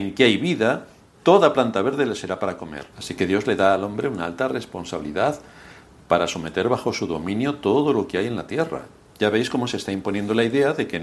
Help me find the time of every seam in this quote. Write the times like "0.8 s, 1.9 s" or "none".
2.9 s, 9.1 s